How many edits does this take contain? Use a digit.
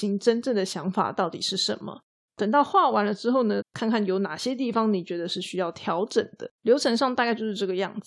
3